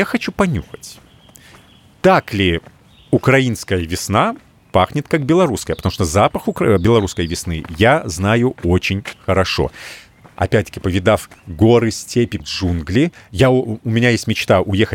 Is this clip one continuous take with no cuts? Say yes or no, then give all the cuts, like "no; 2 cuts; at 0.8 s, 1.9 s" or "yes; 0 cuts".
no; 2 cuts; at 10.3 s, 12.4 s